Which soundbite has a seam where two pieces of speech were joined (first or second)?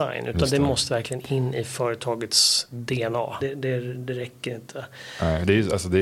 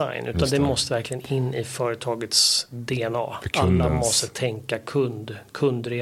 first